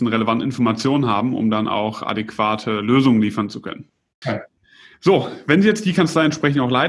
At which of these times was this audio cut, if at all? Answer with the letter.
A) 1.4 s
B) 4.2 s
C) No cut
B